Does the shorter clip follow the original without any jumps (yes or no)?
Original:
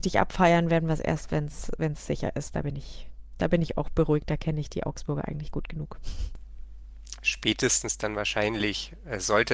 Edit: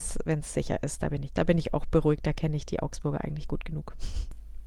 no